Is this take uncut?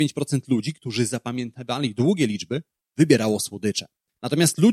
yes; 0 cuts

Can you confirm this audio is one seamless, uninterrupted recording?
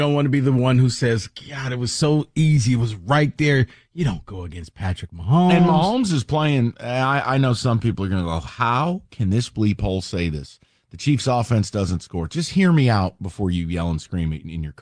yes; 0 cuts

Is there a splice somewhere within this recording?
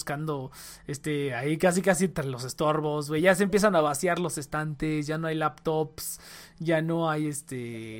no; 0 cuts

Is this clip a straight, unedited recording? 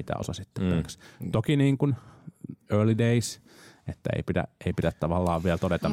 yes; 0 cuts

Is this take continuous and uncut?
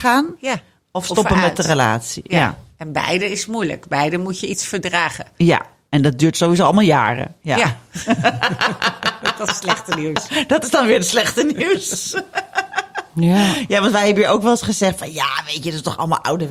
yes; 0 cuts

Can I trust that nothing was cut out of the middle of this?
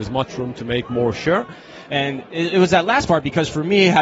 no; 1 cut; at 1.9 s

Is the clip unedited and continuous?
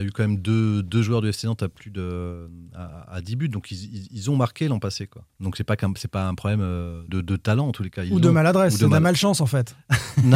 no; 2 cuts; at 5.3 s, 7.1 s

